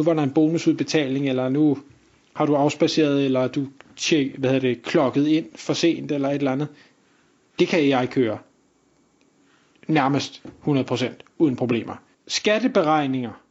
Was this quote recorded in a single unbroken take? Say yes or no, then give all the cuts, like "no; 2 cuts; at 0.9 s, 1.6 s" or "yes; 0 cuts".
no; 1 cut; at 12.1 s